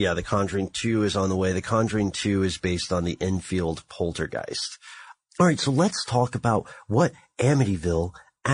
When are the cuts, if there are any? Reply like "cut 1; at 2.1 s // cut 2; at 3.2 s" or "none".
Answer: none

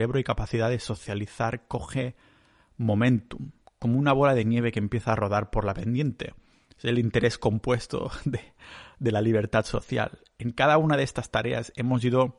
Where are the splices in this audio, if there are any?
none

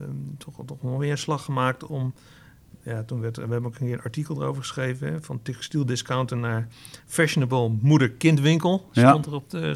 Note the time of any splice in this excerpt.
none

